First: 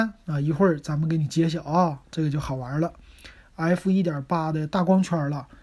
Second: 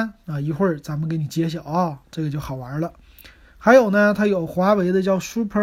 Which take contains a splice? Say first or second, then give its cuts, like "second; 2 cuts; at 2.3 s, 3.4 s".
first; 1 cut; at 3.4 s